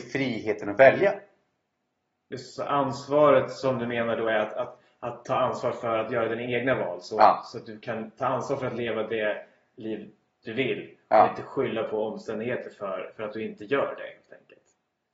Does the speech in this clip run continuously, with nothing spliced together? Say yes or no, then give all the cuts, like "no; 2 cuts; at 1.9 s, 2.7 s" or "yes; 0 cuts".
yes; 0 cuts